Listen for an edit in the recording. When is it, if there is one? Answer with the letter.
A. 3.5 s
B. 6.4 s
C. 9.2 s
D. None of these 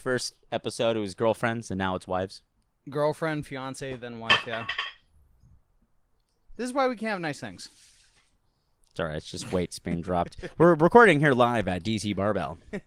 B